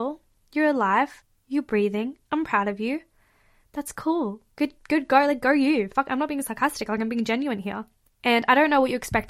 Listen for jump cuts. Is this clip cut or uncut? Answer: cut